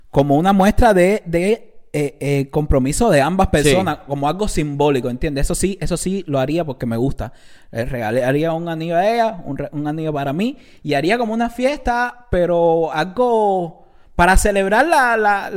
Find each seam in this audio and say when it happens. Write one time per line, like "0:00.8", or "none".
none